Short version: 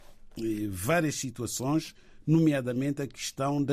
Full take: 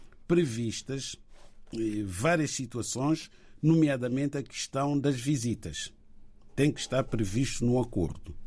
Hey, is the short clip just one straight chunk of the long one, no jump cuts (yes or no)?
yes